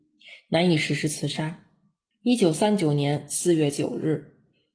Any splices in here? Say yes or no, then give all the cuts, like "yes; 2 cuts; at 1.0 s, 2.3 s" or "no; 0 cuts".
yes; 1 cut; at 2.1 s